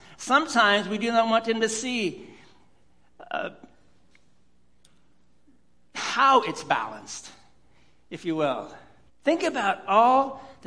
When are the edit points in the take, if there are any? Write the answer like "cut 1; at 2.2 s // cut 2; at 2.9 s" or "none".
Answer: cut 1; at 9.1 s

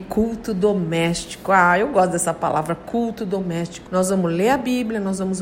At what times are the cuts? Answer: cut 1; at 3.9 s

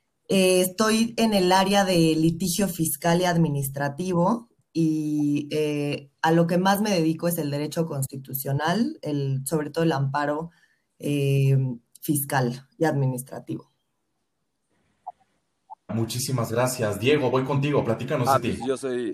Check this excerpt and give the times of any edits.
cut 1; at 15.9 s

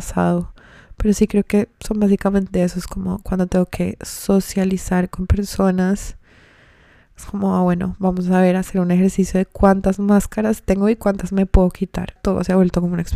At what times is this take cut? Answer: none

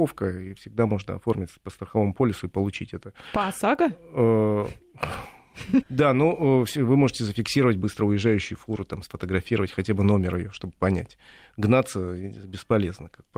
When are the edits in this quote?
cut 1; at 5.8 s

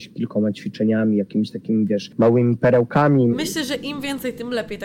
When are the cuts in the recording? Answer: cut 1; at 3.3 s

